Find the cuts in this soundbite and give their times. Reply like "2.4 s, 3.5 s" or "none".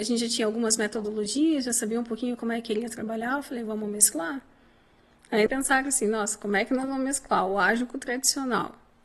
5.5 s